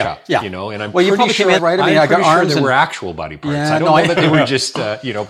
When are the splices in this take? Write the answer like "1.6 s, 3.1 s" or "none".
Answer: 1.6 s